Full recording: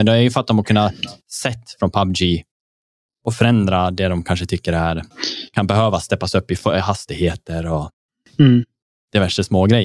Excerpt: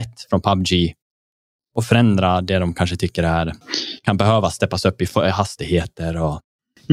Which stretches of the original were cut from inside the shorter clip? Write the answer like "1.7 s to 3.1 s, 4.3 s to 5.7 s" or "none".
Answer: none